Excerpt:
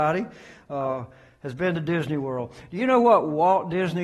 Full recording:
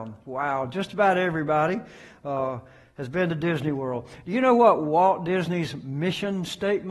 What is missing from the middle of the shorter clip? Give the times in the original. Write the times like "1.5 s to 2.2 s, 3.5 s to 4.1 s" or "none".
none